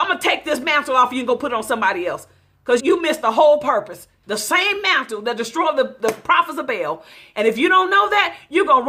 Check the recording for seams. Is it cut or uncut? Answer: cut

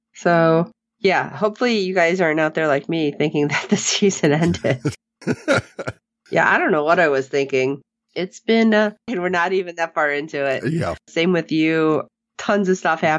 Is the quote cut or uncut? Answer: cut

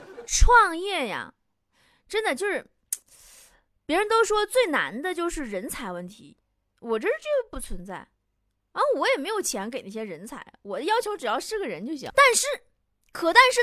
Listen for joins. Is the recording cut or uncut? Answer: cut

